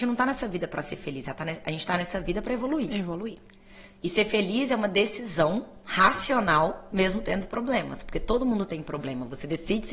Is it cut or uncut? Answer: uncut